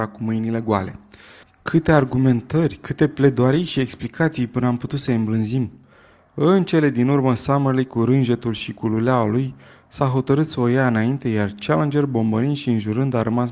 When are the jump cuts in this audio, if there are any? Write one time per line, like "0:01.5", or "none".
none